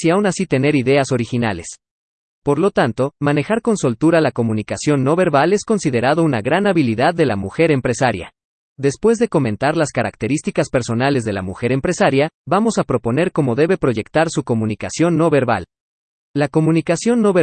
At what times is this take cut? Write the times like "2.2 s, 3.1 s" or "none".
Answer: 2.4 s, 8.7 s